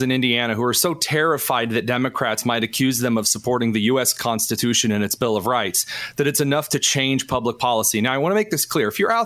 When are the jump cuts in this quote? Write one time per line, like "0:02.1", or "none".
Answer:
none